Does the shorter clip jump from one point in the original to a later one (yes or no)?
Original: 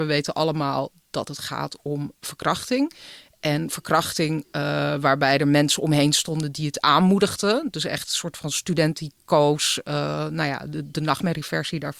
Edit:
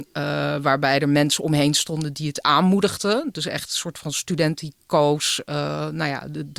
no